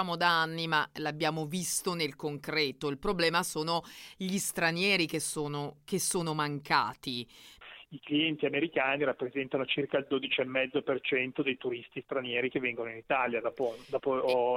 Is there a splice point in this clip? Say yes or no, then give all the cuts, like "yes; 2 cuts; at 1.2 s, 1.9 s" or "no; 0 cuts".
no; 0 cuts